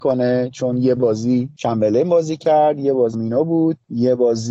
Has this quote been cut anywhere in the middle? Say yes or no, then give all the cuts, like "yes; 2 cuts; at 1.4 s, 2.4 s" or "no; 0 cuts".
yes; 1 cut; at 3.1 s